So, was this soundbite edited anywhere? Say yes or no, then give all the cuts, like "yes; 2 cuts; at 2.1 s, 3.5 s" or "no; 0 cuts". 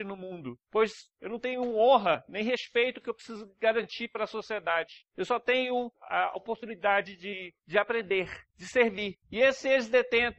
yes; 1 cut; at 5.9 s